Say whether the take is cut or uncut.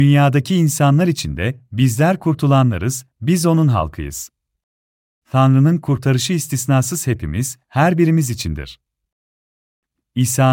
cut